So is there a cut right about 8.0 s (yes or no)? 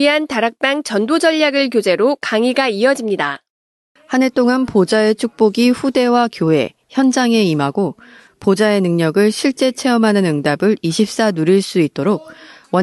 no